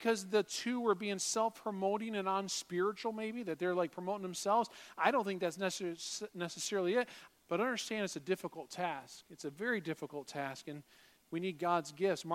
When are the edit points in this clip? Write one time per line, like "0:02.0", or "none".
0:07.3